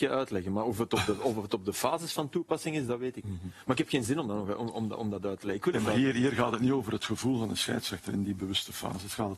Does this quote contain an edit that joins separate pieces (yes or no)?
no